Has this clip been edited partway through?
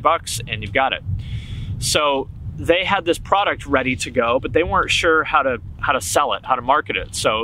no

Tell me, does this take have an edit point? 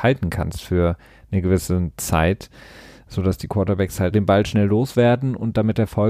yes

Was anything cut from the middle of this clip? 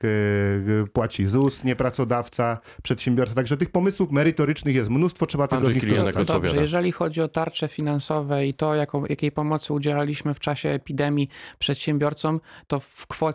no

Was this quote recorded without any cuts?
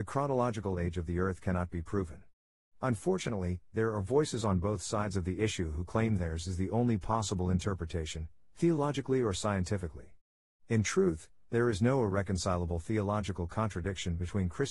yes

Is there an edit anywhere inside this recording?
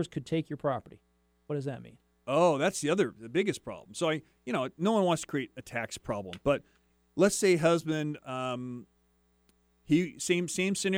no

